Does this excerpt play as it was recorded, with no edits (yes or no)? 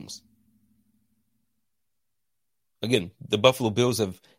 yes